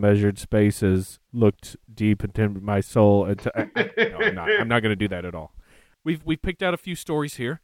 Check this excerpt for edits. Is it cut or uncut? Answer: uncut